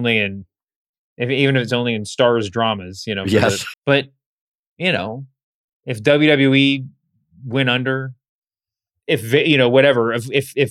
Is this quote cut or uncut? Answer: cut